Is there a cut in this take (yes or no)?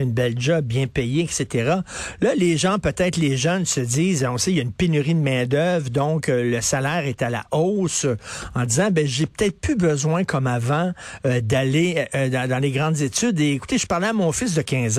no